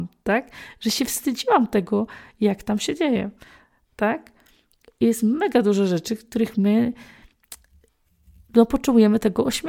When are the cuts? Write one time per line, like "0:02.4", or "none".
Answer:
none